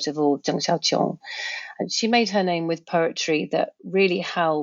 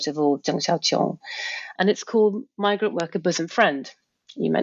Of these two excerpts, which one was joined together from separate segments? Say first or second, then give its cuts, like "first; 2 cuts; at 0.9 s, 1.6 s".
second; 1 cut; at 1.7 s